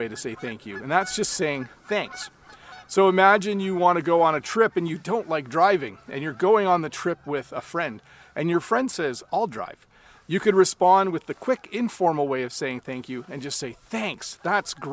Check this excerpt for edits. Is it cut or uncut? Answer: uncut